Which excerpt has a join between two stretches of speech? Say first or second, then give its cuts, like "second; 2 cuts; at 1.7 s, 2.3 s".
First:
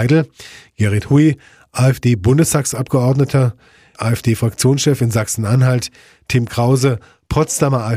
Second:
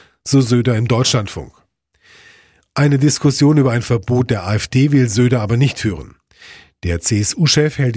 first; 1 cut; at 3.9 s